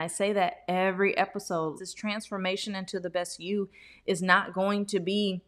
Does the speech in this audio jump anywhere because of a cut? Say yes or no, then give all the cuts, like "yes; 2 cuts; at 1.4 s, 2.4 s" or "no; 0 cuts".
yes; 1 cut; at 1.8 s